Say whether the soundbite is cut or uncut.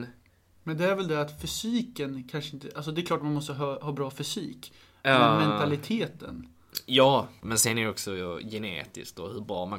cut